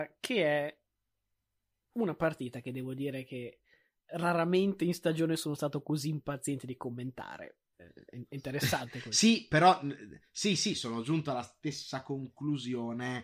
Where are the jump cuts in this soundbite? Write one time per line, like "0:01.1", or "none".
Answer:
0:07.7